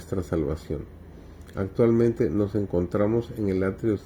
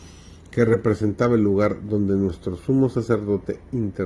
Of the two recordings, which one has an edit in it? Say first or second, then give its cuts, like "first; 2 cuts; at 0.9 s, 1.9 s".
first; 1 cut; at 1.5 s